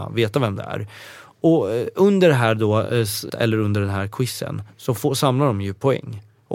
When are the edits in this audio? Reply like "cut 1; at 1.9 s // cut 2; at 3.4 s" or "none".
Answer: cut 1; at 3.3 s